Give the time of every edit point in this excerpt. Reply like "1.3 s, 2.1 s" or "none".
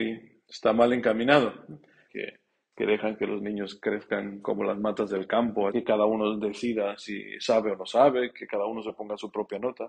2.1 s, 5.7 s